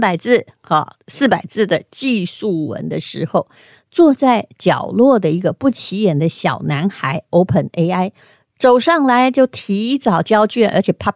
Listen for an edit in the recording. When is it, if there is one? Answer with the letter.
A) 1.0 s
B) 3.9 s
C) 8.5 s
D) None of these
A